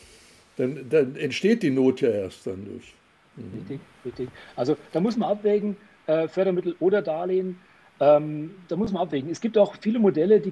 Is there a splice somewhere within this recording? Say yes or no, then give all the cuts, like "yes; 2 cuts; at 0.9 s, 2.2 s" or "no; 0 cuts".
no; 0 cuts